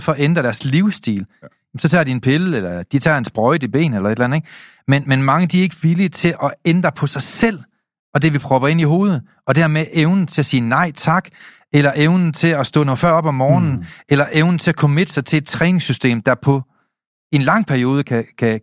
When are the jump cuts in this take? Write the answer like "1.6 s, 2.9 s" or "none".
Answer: none